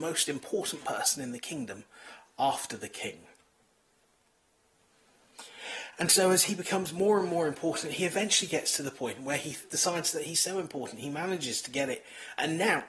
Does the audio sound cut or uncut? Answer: uncut